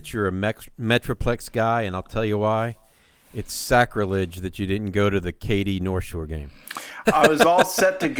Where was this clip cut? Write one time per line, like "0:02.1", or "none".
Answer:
0:07.1